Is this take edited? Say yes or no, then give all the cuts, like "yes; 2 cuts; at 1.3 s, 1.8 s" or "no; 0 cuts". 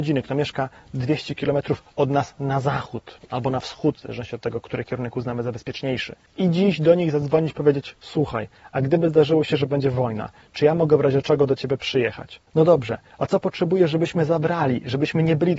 no; 0 cuts